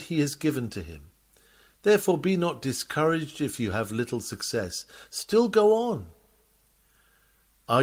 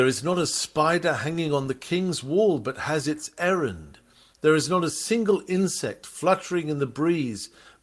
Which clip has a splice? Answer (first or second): second